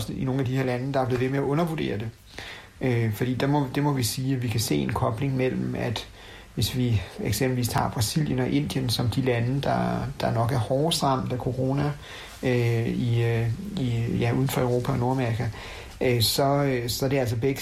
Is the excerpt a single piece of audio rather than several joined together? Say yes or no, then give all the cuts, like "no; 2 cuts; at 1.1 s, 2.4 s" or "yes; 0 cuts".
yes; 0 cuts